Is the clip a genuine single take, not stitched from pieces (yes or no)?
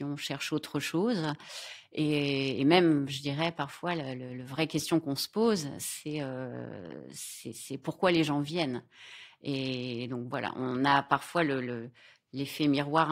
yes